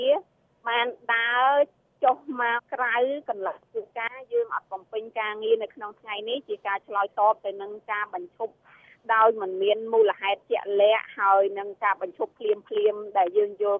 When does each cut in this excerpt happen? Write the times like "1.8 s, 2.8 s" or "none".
2.6 s